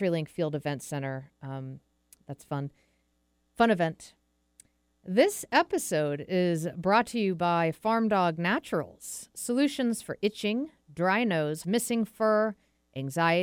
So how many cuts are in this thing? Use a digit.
1